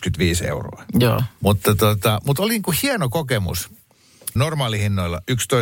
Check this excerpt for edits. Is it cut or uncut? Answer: cut